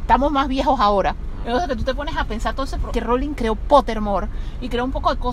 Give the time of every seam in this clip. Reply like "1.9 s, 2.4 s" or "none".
1.4 s, 2.9 s